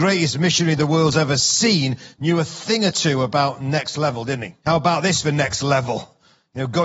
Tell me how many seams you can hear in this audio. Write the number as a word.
one